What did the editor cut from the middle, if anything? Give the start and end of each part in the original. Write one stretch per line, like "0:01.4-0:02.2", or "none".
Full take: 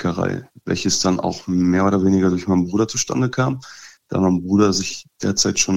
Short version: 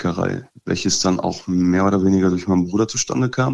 none